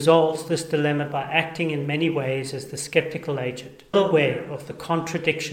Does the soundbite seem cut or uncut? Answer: cut